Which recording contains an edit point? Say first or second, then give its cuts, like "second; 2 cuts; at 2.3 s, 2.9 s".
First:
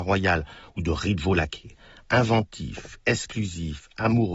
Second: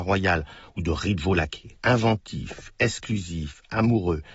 second; 1 cut; at 1.8 s